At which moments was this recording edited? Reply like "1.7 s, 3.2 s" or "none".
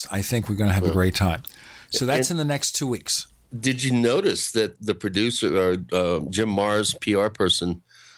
4.7 s